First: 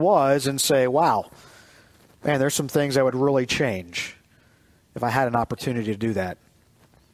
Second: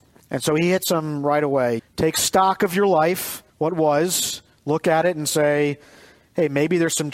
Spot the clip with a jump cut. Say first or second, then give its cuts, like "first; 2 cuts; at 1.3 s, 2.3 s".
second; 2 cuts; at 1.8 s, 3.5 s